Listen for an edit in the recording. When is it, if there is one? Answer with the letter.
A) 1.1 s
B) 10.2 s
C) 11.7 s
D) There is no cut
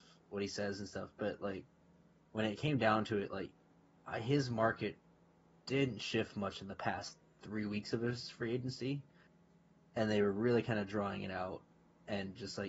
A